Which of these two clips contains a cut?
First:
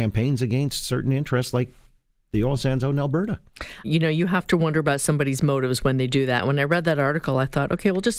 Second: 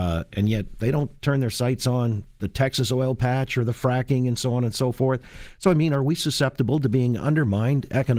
first; 1 cut; at 3.8 s

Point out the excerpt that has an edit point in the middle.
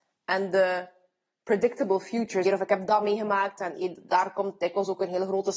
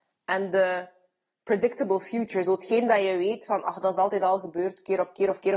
first; 1 cut; at 2.5 s

